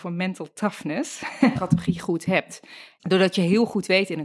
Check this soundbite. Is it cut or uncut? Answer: cut